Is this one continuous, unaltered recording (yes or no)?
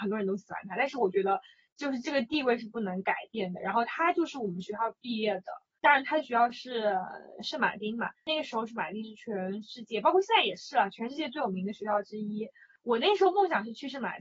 yes